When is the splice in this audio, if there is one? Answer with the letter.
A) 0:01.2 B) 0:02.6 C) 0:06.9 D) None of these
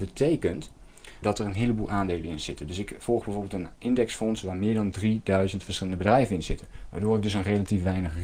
A